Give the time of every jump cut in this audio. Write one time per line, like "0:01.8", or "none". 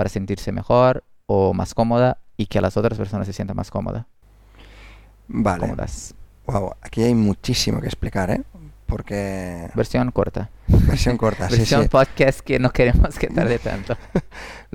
none